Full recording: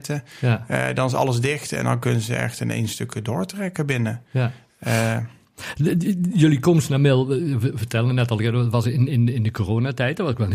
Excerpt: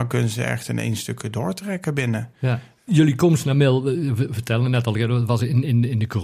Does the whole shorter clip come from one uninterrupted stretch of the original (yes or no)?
no